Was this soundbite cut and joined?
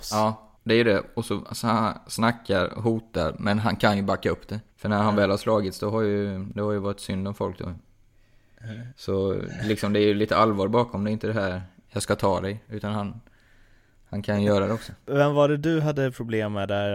yes; 1 cut; at 4.7 s

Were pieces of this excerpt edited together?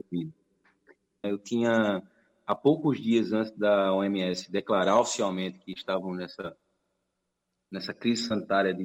yes; 1 cut; at 1.2 s

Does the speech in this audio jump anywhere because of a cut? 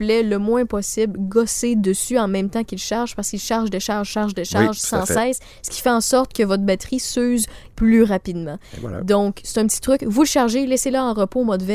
no; 0 cuts

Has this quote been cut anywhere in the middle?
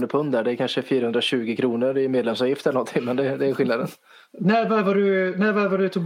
no; 0 cuts

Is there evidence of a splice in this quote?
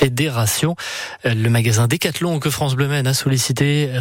no; 0 cuts

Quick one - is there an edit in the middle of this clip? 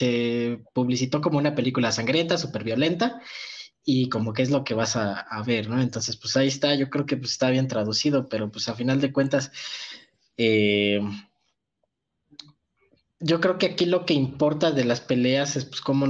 no; 0 cuts

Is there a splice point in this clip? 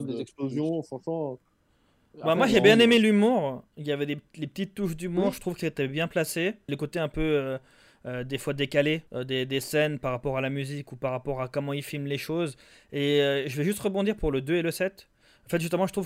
yes; 2 cuts; at 6.7 s, 9.1 s

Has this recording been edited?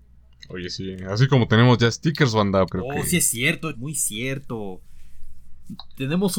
yes; 2 cuts; at 2.7 s, 3.7 s

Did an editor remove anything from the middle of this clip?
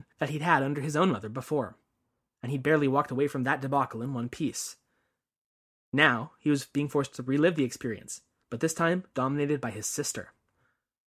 no; 0 cuts

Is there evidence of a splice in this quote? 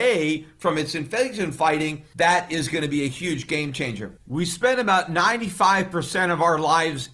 yes; 1 cut; at 4.2 s

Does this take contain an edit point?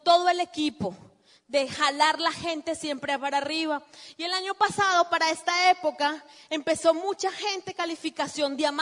no; 0 cuts

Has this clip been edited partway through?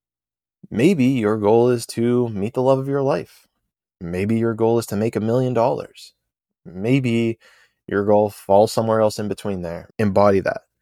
yes; 1 cut; at 9.9 s

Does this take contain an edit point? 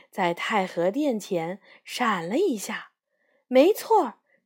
no; 0 cuts

